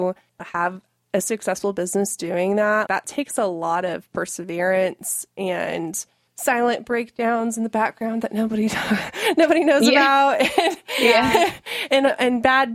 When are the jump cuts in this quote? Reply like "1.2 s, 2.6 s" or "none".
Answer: 2.9 s